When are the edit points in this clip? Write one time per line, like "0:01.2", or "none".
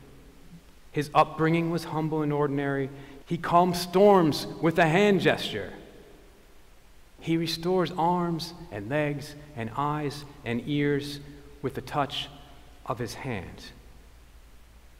0:03.2
0:07.2